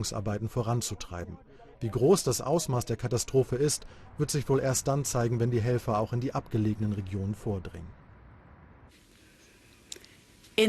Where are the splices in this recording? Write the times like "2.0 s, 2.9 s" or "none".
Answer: none

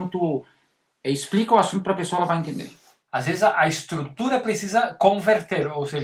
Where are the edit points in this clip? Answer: 3.0 s

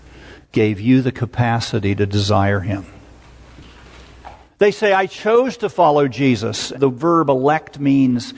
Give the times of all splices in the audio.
4.5 s, 6.7 s

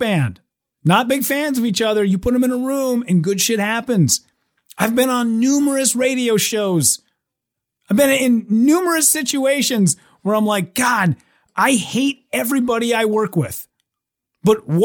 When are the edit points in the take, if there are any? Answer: none

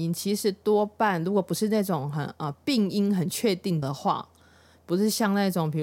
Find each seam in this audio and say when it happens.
3.8 s

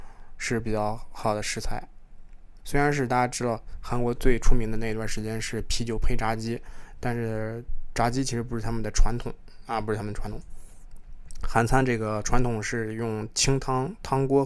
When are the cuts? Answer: 2.6 s

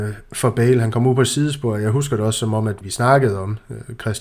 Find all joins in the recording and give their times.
2.8 s

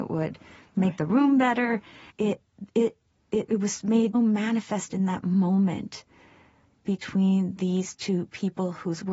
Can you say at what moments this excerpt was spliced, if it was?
2.1 s, 4.1 s

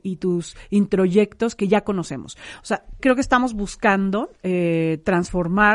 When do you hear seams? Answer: 3.0 s, 4.4 s

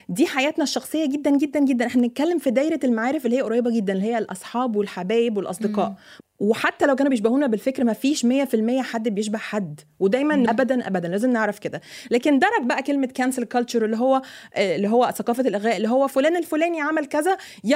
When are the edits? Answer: 6.2 s, 10.5 s

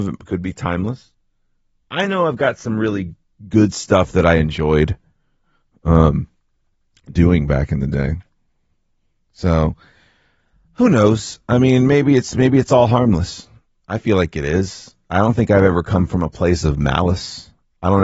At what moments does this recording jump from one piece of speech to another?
none

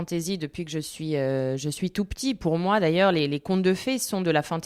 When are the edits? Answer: none

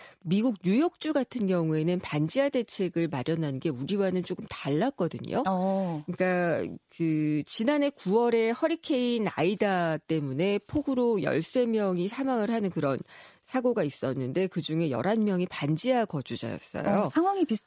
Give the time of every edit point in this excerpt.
none

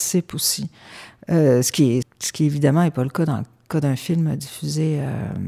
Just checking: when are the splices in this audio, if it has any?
2.0 s

